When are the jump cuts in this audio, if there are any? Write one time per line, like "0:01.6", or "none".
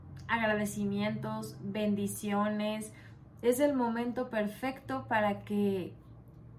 0:03.4